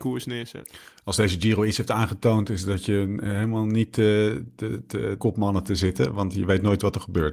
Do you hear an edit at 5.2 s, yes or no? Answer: yes